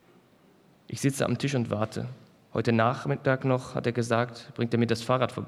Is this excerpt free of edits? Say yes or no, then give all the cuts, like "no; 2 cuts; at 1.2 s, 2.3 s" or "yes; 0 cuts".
yes; 0 cuts